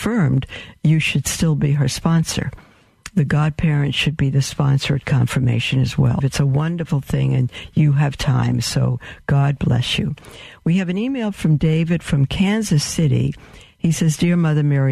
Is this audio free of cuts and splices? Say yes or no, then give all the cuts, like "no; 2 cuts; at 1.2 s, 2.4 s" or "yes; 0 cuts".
no; 1 cut; at 6.2 s